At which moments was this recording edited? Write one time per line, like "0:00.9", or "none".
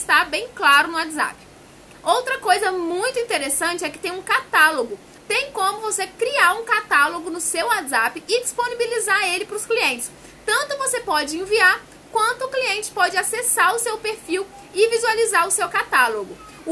0:05.2